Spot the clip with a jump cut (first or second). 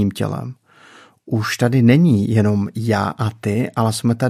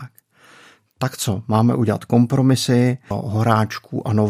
second